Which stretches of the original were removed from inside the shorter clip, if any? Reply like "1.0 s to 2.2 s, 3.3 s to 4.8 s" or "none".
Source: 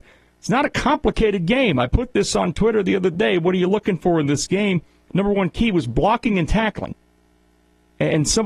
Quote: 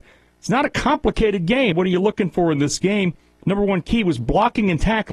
1.7 s to 3.4 s